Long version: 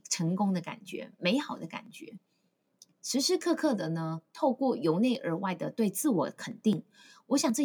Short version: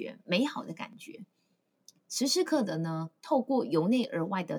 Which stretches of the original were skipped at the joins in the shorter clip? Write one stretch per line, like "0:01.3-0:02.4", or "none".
0:03.4-0:03.6